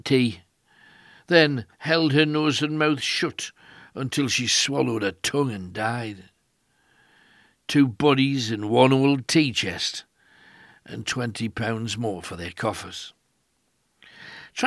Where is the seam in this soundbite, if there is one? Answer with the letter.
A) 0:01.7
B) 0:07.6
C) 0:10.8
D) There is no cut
A